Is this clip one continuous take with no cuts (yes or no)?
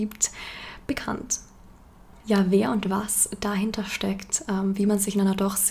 yes